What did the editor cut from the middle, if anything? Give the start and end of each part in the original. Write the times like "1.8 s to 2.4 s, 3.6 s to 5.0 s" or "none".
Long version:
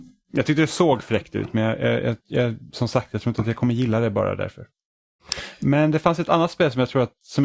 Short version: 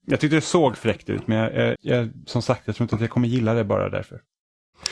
2.0 s to 2.2 s